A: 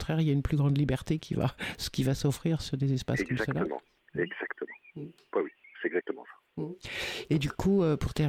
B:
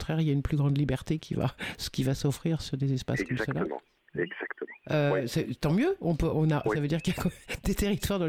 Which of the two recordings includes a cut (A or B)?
B